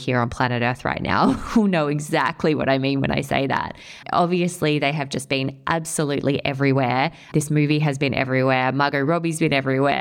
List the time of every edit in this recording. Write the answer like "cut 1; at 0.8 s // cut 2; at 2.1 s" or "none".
none